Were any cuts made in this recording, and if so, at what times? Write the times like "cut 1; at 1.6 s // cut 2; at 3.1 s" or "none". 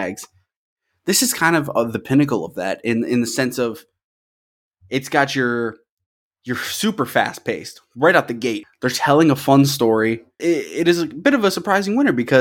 cut 1; at 8.6 s // cut 2; at 10.4 s

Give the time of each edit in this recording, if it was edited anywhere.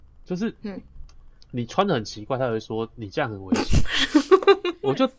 none

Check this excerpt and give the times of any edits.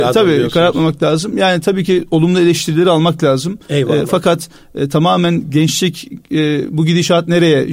none

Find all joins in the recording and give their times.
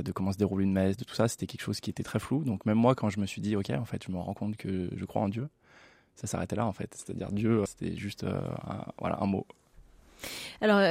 cut 1; at 7.7 s

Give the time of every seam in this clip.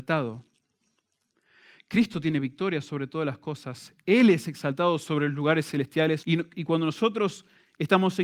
cut 1; at 6.2 s

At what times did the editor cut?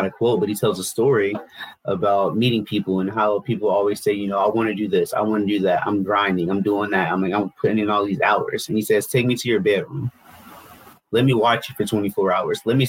none

